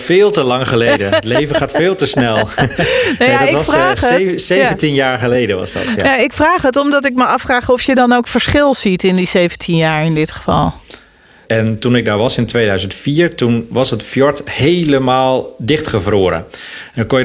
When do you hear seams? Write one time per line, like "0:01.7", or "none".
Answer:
0:11.4